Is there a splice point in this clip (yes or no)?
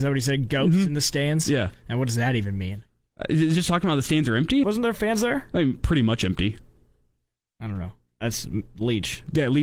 yes